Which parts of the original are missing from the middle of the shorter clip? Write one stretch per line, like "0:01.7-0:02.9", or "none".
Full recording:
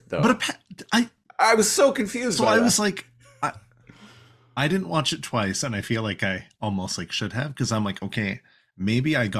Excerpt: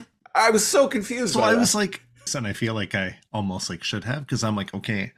0:03.3-0:05.6